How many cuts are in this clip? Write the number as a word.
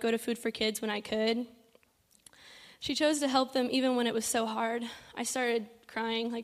one